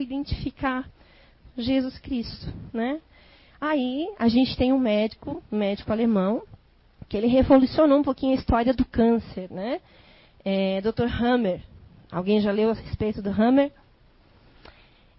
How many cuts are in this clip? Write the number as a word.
zero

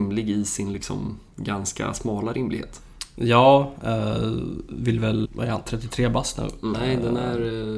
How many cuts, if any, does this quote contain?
two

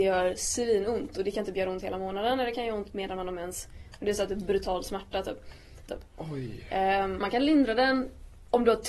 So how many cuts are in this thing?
two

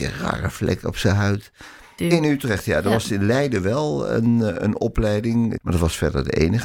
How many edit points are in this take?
two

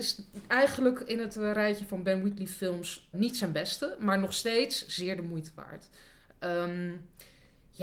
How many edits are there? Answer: one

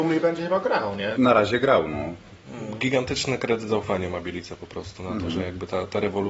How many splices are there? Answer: one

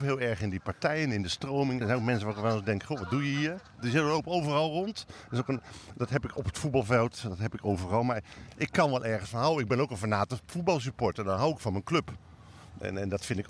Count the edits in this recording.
one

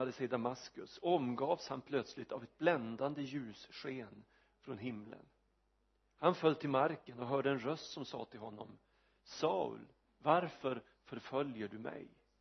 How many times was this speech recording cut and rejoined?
one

